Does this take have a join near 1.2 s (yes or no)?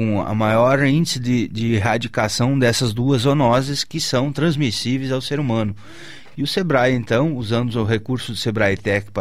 no